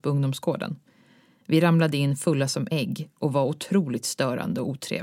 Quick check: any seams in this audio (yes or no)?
no